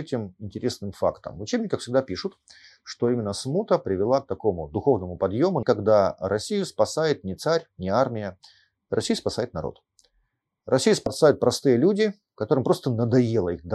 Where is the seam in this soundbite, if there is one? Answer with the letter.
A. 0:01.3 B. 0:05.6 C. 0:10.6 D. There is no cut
B